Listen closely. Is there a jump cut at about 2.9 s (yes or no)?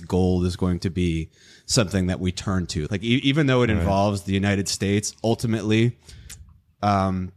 yes